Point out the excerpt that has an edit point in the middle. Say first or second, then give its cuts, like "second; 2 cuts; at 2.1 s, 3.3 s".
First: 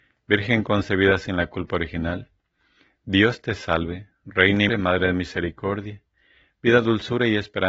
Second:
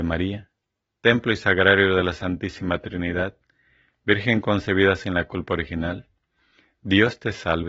first; 1 cut; at 4.7 s